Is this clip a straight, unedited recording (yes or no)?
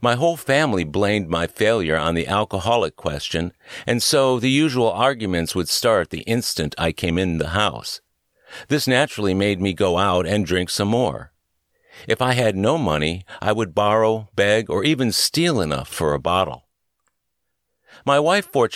yes